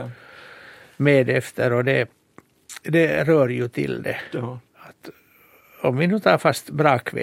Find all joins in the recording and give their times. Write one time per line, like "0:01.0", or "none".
0:04.7